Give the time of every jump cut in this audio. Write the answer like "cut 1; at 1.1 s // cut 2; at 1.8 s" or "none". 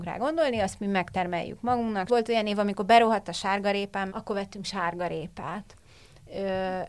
cut 1; at 2.1 s // cut 2; at 4.1 s